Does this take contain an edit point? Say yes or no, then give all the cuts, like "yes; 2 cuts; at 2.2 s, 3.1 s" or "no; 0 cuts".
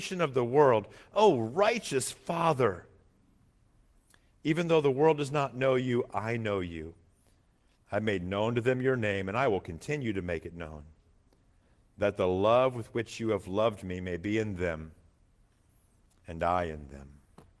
yes; 1 cut; at 7.7 s